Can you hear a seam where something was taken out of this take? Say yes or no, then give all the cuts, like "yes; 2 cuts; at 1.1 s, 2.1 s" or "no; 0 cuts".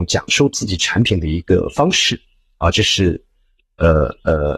no; 0 cuts